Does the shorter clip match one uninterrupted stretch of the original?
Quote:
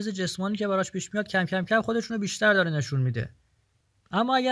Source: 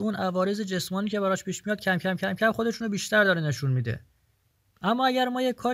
no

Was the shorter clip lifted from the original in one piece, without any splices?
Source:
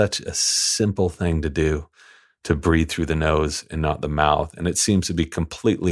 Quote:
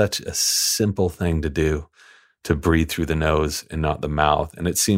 yes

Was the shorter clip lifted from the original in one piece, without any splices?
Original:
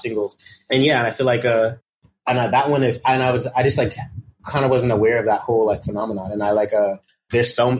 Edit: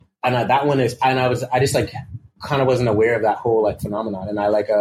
yes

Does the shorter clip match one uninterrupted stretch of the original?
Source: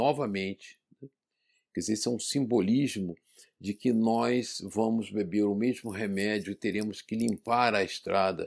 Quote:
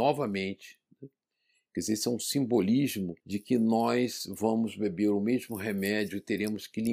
no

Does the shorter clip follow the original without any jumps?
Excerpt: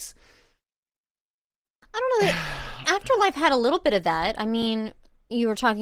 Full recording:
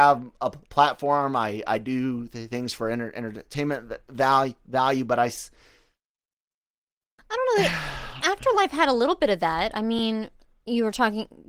yes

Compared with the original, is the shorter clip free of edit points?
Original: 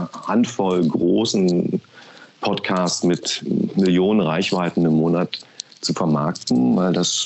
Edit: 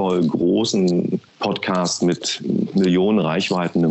no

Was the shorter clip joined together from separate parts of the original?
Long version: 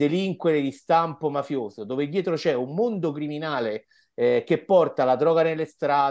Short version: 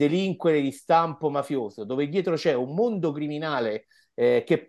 no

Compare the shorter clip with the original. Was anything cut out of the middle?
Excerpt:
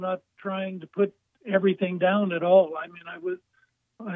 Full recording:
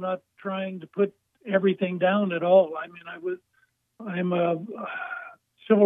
no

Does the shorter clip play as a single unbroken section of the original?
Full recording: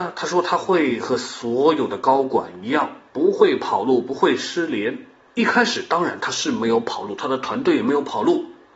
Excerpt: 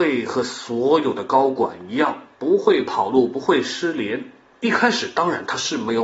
yes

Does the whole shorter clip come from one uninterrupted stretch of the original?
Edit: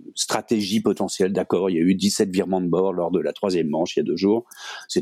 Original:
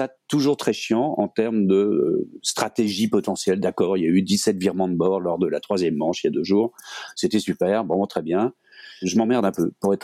yes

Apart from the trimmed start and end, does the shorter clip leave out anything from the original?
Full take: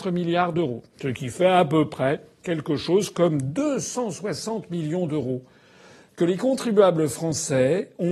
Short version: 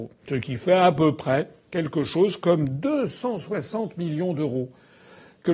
no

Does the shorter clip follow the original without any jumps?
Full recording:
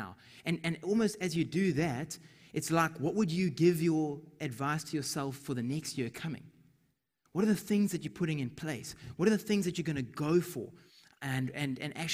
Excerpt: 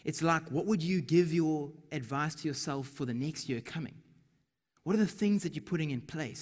yes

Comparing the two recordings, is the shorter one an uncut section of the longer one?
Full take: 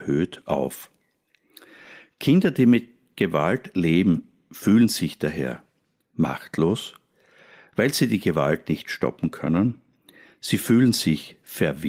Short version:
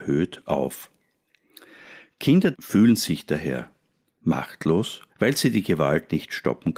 no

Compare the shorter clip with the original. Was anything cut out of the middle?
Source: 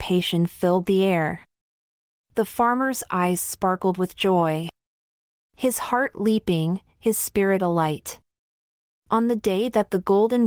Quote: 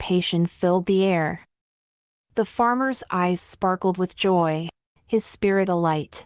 yes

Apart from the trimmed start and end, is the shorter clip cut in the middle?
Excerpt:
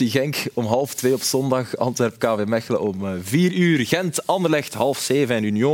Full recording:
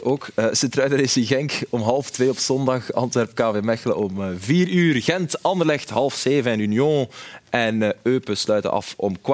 no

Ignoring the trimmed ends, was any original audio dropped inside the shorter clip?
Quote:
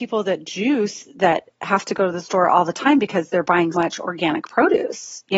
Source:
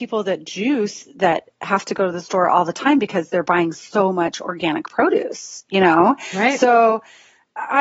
yes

